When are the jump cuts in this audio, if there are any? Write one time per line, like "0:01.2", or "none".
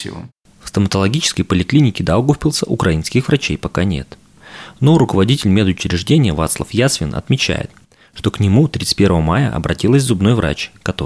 none